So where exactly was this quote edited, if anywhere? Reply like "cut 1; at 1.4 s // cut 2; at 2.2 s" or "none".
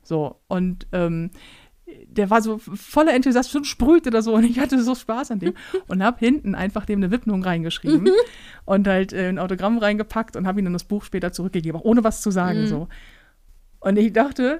none